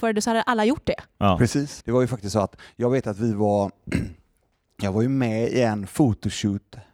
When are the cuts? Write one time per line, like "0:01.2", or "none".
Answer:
0:01.8

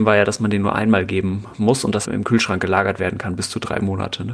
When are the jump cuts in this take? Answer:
0:02.0

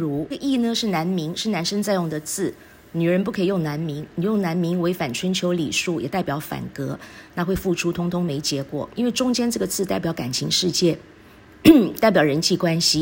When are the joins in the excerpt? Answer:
none

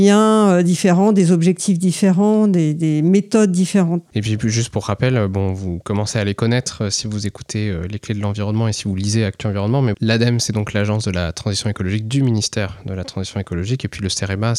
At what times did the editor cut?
0:04.1
0:09.9

